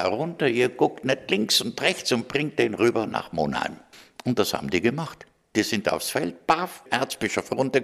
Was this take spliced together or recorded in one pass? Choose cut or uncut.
uncut